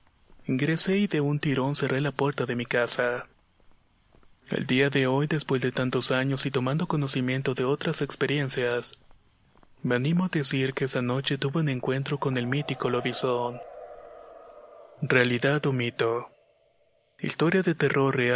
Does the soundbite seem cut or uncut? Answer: uncut